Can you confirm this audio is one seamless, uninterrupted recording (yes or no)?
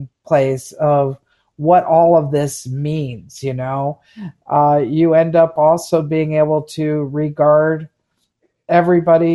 yes